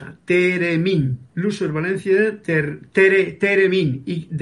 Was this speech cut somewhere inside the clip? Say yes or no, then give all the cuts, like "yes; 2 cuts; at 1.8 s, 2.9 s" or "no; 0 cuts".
yes; 1 cut; at 1.3 s